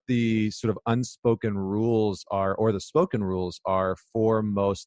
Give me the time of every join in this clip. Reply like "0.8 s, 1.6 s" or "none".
none